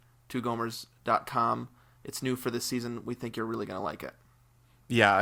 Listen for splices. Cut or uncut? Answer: uncut